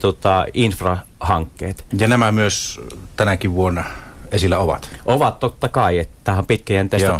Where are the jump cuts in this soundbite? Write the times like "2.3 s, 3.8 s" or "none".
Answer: 1.9 s